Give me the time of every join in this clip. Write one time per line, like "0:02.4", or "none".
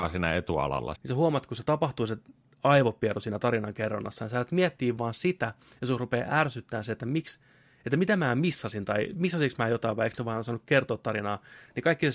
0:01.0